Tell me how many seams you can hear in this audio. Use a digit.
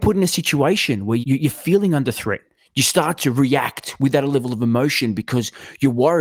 2